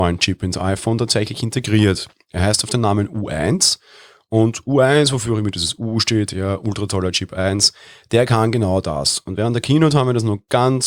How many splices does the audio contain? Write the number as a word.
zero